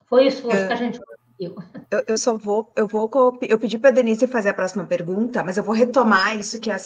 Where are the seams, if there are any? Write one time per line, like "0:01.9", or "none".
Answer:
0:01.8